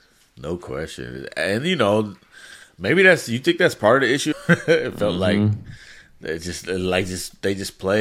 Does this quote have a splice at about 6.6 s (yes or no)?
no